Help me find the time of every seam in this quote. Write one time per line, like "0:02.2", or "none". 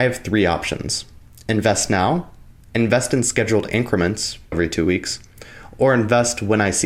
0:04.5